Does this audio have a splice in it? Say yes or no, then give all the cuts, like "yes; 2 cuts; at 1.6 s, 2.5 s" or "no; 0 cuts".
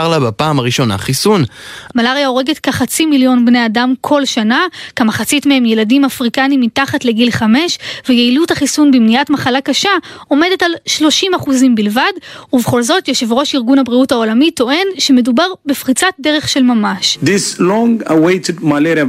yes; 1 cut; at 1.9 s